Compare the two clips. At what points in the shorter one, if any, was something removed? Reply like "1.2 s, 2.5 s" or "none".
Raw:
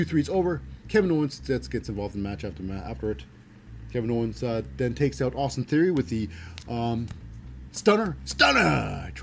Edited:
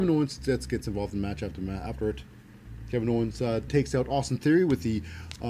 3.7 s